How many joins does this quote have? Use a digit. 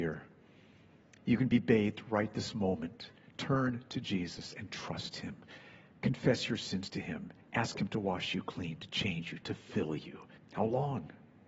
1